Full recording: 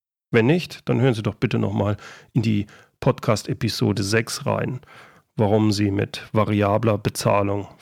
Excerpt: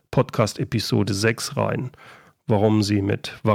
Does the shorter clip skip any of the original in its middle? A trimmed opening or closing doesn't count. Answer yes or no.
no